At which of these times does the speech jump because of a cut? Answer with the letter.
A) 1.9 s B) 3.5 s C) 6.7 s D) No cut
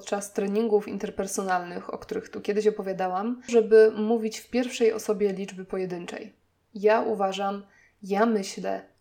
B